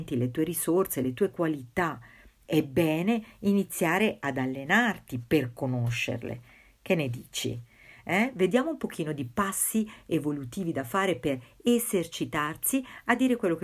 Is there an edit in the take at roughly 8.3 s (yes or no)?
no